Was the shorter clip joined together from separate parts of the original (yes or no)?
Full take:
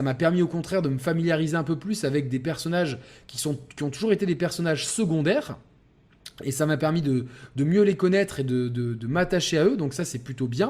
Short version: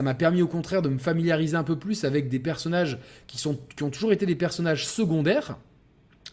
no